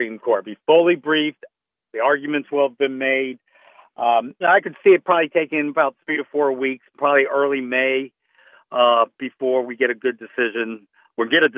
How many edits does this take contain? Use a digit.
1